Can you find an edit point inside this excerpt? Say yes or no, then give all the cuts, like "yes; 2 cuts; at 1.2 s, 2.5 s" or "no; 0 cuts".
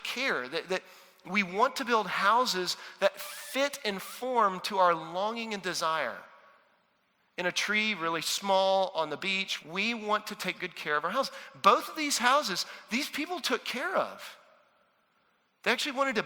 yes; 1 cut; at 9.6 s